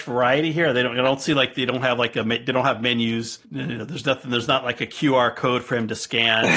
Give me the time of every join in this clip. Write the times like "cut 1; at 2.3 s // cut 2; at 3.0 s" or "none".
cut 1; at 3.4 s